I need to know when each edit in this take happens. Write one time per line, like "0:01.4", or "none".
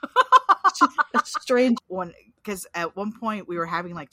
0:01.8